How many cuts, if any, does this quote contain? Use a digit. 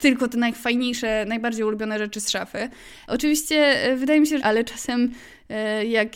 2